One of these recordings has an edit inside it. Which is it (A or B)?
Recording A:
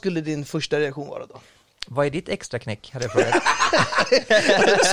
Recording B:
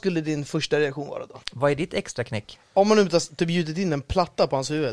B